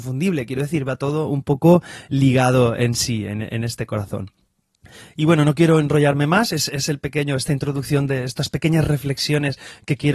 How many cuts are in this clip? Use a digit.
0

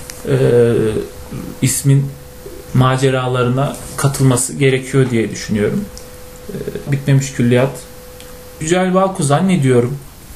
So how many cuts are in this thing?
2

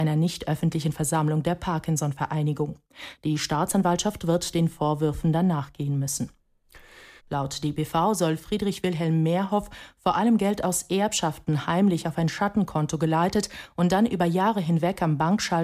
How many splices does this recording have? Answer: 2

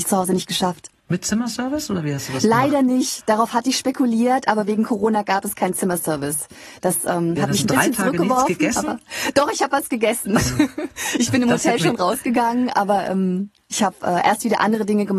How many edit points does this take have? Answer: 1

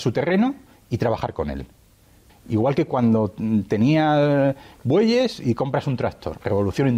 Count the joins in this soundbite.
1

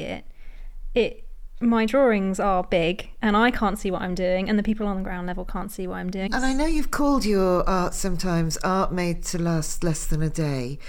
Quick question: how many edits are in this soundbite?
1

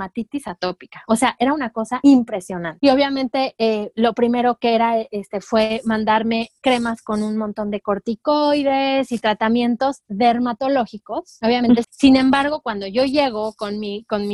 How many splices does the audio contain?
1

